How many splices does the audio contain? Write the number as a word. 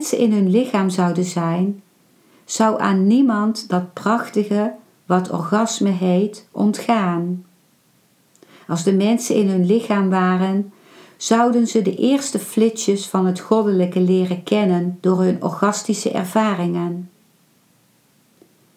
zero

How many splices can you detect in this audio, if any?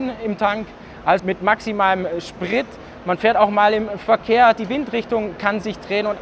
one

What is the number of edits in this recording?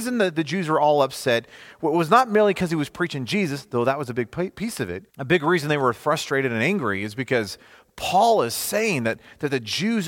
one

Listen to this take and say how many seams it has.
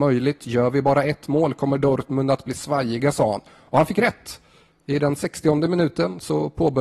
zero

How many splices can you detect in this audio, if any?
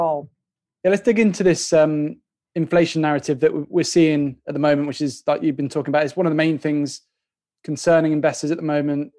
zero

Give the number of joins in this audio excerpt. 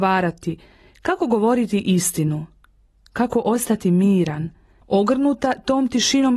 one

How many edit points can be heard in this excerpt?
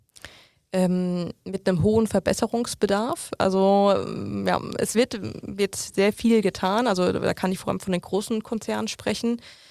zero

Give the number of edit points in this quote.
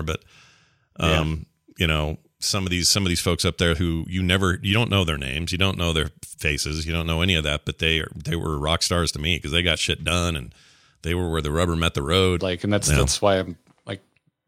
one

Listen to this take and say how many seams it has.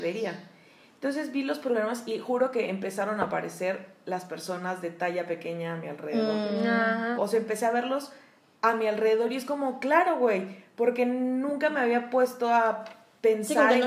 one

